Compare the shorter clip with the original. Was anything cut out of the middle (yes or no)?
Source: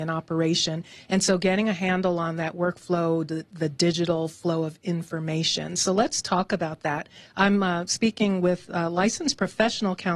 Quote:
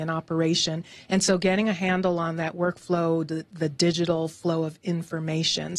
no